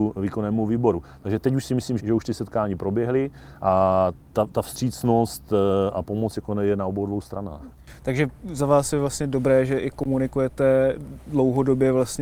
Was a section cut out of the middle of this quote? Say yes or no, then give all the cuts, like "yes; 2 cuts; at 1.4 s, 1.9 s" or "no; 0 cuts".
yes; 1 cut; at 2.0 s